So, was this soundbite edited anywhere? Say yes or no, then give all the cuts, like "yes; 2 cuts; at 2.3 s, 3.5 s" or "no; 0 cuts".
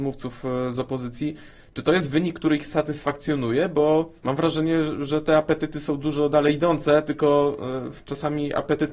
yes; 1 cut; at 4.2 s